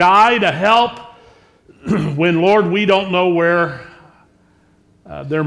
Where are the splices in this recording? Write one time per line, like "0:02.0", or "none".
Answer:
none